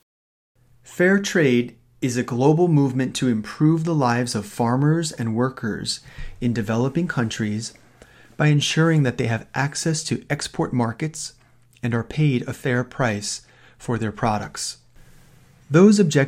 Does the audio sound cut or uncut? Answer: uncut